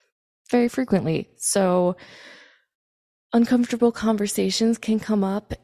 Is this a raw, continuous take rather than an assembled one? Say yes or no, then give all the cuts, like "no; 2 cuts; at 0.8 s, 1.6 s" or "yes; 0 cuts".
yes; 0 cuts